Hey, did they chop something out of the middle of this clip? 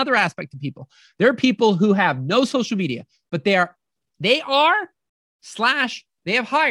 no; 0 cuts

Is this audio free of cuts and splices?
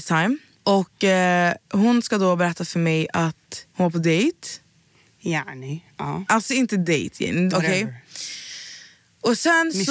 no; 1 cut; at 7.5 s

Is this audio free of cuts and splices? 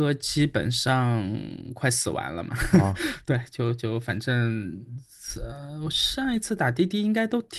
yes; 0 cuts

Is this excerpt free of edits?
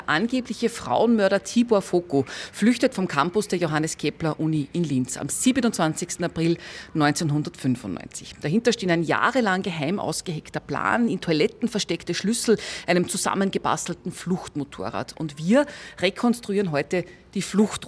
yes; 0 cuts

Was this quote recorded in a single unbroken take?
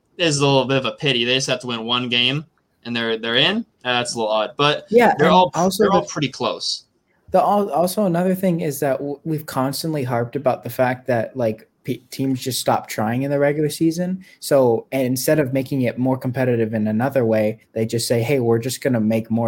yes; 0 cuts

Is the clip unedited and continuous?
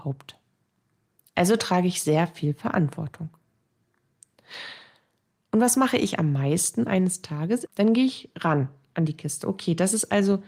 no; 1 cut; at 7.7 s

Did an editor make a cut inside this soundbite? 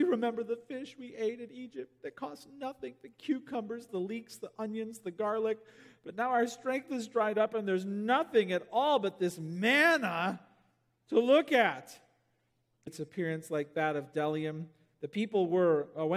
yes; 2 cuts; at 3.9 s, 12.9 s

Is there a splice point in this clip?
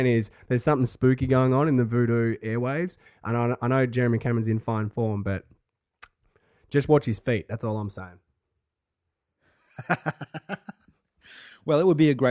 no; 0 cuts

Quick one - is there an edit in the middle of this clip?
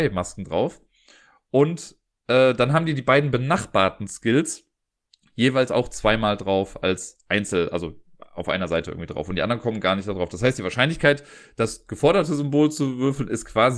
no; 0 cuts

